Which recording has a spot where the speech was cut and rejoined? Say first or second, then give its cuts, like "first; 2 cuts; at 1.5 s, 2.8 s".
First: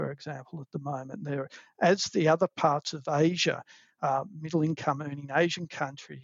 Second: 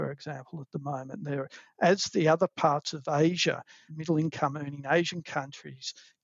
second; 1 cut; at 3.9 s